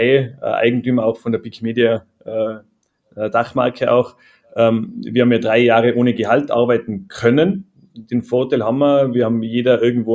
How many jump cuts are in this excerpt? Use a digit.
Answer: 0